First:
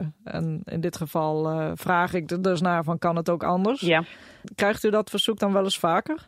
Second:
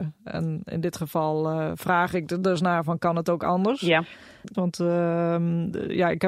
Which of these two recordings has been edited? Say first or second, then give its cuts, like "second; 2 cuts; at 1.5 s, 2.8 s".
second; 1 cut; at 4.5 s